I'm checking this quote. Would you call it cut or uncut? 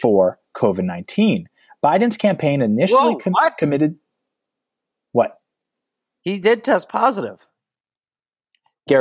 uncut